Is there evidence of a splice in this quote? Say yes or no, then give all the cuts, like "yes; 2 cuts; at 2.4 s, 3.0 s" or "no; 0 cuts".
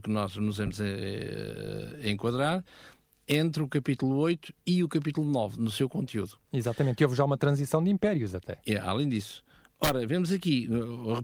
no; 0 cuts